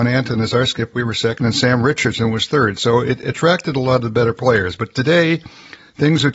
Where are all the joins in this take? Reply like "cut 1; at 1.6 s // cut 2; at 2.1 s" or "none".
none